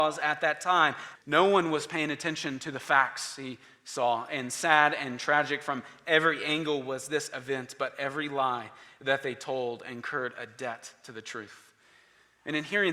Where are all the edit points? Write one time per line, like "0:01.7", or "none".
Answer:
0:01.2